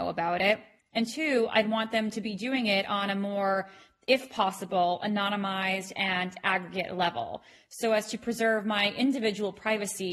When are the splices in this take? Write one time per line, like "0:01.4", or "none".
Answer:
none